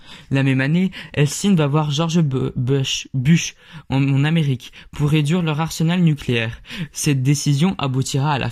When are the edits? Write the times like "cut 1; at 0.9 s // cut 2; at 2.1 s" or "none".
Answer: none